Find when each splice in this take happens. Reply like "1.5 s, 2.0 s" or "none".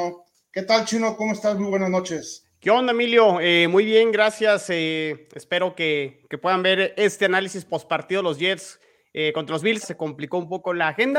9.8 s